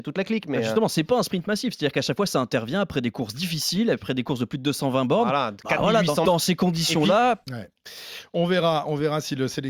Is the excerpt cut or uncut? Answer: cut